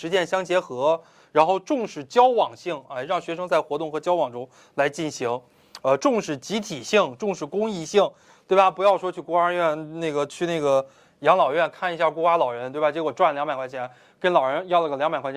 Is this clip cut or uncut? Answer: uncut